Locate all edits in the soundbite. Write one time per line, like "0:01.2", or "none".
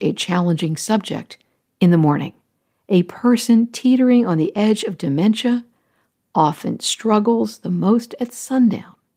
none